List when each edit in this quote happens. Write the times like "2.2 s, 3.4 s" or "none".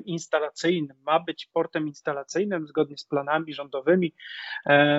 none